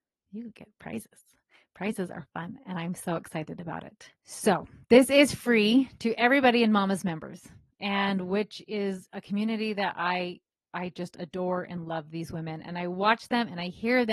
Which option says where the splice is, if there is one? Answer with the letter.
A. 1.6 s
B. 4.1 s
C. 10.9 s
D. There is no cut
B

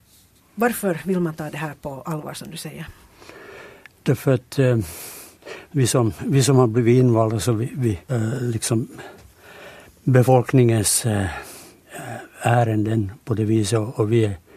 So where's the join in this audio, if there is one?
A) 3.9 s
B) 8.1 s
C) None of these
B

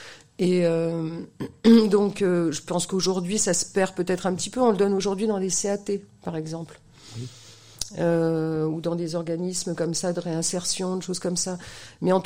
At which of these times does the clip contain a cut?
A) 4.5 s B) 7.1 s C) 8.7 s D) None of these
D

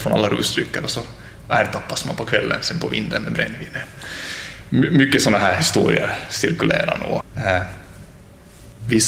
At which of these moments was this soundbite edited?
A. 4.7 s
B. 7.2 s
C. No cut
B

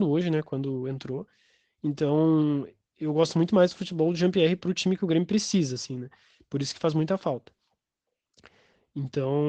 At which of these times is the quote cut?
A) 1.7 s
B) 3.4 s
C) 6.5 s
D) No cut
D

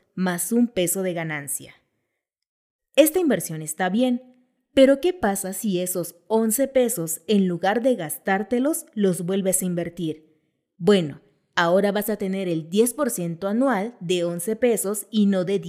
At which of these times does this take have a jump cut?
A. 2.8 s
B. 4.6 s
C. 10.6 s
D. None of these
A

